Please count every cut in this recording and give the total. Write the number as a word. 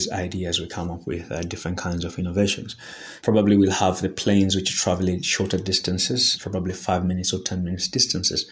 two